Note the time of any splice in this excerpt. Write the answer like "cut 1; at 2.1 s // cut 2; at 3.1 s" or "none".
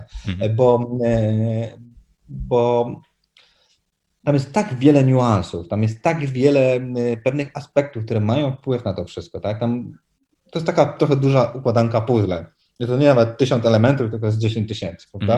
none